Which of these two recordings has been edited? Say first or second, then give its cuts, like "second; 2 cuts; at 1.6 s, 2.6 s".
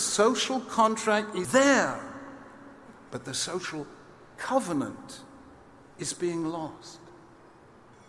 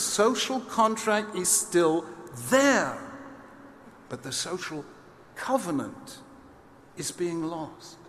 first; 1 cut; at 1.4 s